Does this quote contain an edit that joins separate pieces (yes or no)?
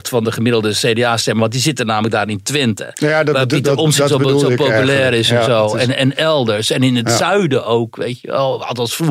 no